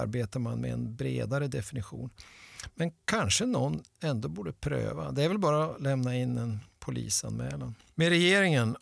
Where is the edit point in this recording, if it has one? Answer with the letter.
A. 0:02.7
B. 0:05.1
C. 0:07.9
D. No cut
A